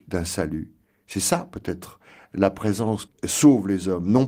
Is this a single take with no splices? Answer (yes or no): no